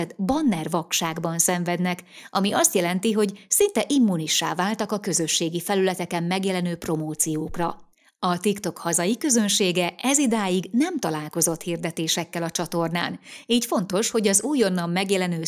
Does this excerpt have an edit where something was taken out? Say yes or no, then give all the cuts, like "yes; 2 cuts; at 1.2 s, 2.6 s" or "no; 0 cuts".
no; 0 cuts